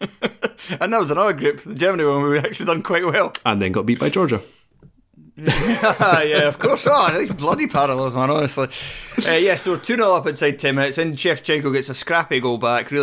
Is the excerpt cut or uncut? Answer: uncut